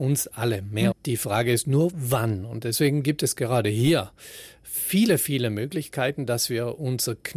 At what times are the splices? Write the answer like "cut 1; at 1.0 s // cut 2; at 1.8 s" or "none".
cut 1; at 0.9 s